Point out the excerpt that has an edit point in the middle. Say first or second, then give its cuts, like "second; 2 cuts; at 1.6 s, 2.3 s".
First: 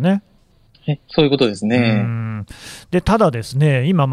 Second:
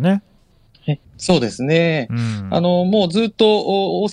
second; 1 cut; at 1.0 s